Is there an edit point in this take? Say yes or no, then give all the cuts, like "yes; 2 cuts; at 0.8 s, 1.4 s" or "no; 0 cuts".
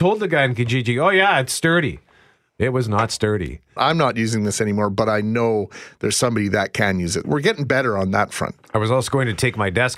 yes; 2 cuts; at 3.8 s, 7.2 s